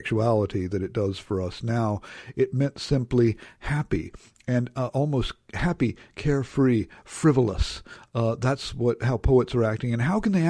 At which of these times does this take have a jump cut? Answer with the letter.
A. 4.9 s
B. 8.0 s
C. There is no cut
C